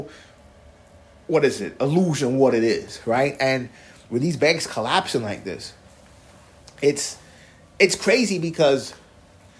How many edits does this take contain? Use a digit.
0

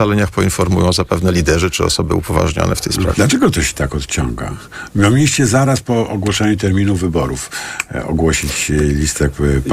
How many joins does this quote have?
1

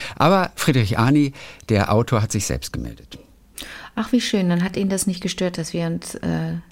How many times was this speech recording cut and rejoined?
0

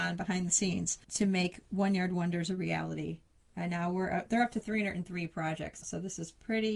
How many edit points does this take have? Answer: 1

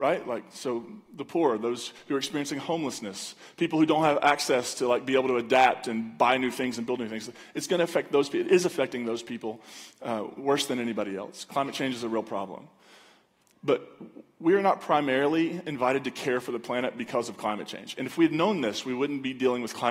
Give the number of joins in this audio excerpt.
0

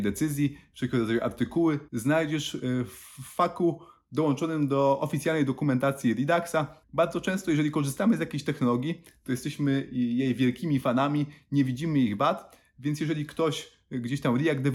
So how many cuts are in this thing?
2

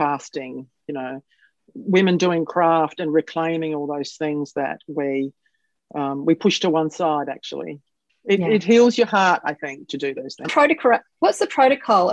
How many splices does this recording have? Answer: 2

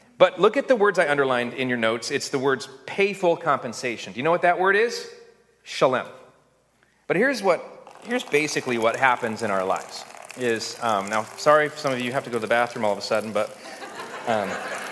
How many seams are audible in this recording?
1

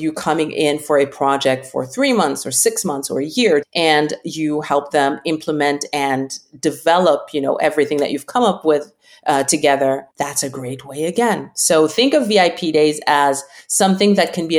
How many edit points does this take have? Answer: 2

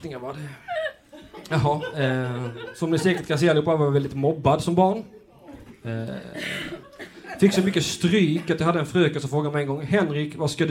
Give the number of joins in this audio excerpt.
0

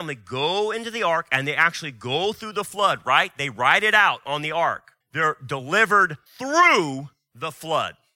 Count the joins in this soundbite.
2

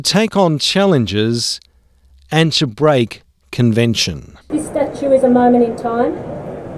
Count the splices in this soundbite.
0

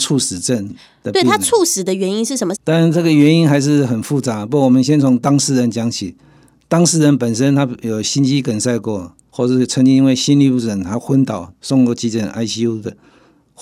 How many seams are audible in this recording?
2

